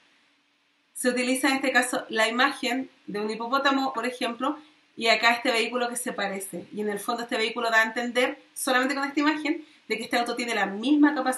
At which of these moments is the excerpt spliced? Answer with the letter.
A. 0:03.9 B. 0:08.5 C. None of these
A